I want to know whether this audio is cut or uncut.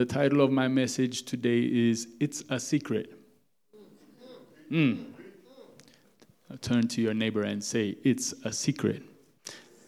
uncut